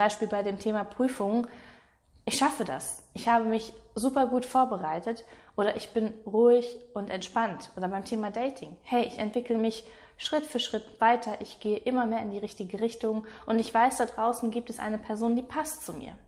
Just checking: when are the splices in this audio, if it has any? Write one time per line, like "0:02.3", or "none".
none

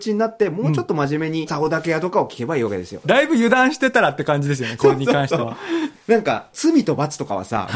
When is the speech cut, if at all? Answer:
0:01.5
0:03.0
0:05.9

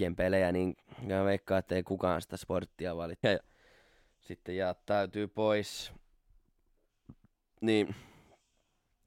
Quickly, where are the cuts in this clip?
0:03.2

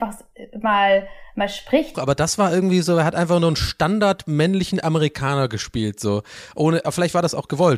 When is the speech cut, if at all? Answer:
0:01.9
0:06.8

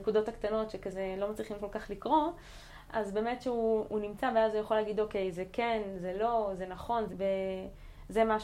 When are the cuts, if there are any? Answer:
0:02.9
0:07.1

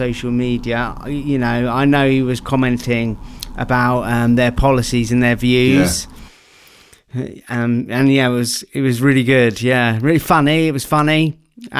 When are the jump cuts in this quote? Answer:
none

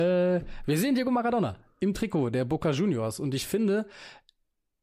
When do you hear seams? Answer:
0:01.7

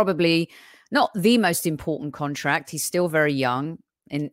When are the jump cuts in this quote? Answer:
none

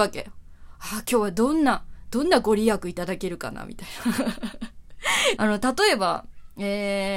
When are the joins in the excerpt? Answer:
0:05.4

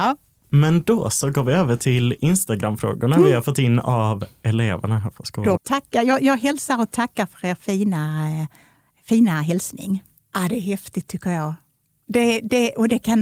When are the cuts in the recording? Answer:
0:05.6
0:10.2

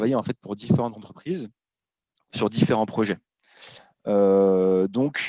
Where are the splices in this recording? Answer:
none

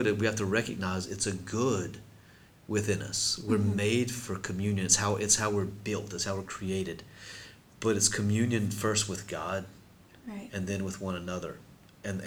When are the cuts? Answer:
none

